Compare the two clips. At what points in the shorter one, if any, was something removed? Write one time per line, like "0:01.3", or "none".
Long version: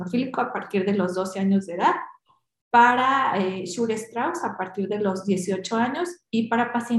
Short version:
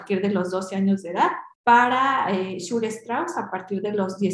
0:01.5